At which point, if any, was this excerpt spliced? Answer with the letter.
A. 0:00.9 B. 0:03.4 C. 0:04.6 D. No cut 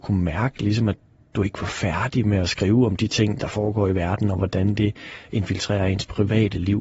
D